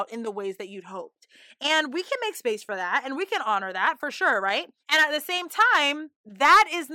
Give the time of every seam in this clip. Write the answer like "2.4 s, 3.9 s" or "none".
4.8 s

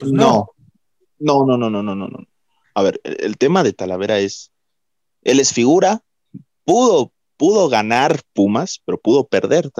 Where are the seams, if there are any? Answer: none

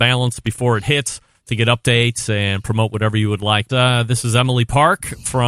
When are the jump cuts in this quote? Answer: 3.7 s

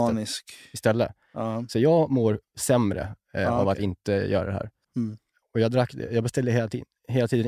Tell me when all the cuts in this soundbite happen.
4.8 s

